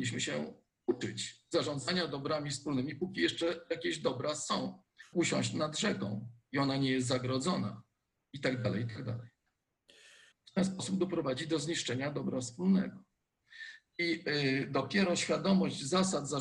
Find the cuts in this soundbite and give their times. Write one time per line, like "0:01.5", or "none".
0:05.1
0:10.3